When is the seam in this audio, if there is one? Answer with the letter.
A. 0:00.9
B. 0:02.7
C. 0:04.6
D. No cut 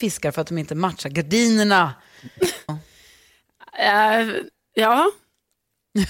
B